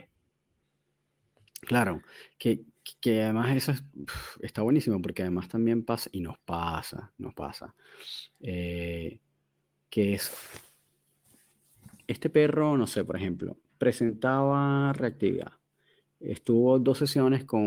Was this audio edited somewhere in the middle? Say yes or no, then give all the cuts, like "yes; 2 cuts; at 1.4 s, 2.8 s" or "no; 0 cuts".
no; 0 cuts